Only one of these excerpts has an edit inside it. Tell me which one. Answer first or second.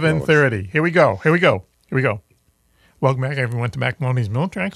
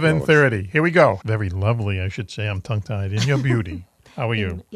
second